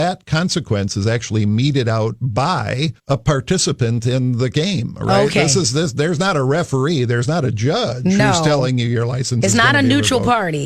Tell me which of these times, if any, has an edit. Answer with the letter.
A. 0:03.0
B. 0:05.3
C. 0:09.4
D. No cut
A